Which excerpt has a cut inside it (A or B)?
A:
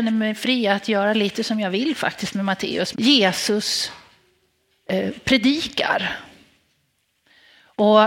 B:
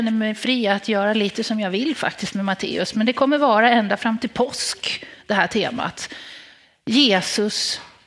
A